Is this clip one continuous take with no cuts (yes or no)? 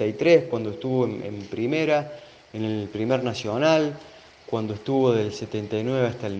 yes